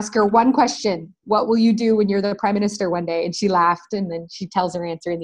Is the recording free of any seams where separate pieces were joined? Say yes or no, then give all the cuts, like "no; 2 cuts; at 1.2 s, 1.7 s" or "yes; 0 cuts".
yes; 0 cuts